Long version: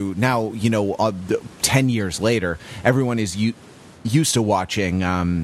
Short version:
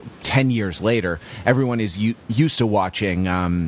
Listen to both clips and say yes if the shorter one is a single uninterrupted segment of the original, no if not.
no